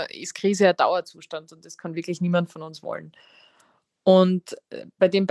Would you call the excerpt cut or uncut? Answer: uncut